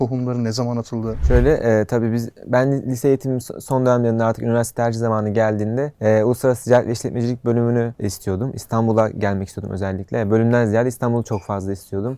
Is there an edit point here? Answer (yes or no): no